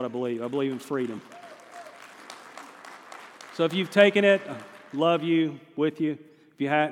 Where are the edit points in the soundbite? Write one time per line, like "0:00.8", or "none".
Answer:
none